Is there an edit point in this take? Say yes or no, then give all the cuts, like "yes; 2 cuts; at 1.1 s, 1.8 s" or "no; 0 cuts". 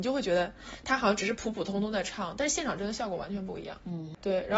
no; 0 cuts